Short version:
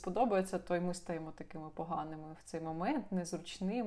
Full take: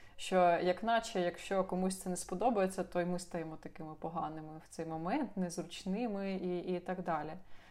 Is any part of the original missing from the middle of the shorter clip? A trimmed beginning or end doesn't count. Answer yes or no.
no